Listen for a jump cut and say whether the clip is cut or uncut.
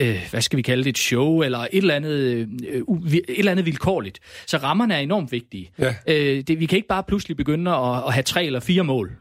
uncut